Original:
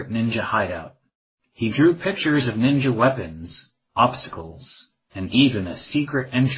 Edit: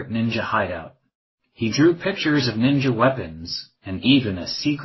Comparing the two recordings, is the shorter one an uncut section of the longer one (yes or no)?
no